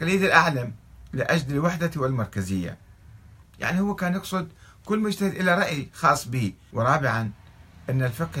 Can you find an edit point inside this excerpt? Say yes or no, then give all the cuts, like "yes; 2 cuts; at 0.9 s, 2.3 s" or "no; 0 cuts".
yes; 2 cuts; at 3.4 s, 6.7 s